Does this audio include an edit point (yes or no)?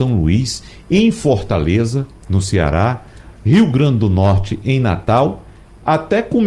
no